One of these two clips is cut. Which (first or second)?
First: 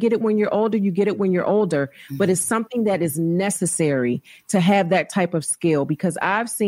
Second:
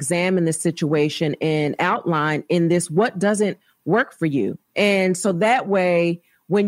second